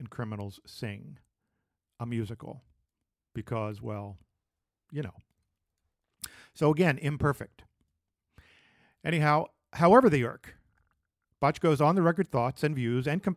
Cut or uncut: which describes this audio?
uncut